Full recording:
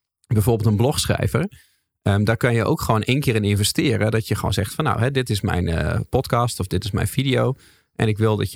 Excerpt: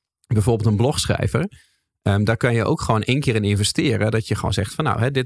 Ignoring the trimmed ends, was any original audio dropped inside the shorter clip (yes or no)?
no